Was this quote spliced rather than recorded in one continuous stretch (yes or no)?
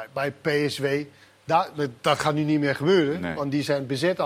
no